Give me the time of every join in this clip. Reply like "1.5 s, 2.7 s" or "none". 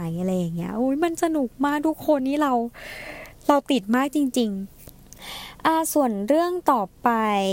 2.2 s